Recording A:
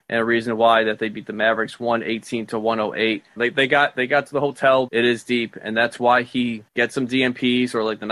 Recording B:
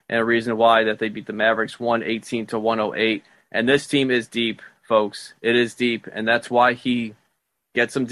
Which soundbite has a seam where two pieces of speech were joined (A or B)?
A